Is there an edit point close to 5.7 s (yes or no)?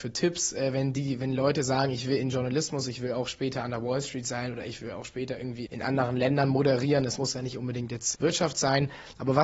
yes